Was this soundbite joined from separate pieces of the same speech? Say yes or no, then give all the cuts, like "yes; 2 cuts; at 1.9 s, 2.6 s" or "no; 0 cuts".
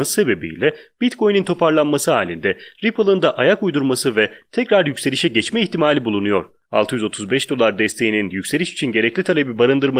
yes; 1 cut; at 6.6 s